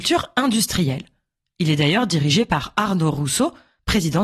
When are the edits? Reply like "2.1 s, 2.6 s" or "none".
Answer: none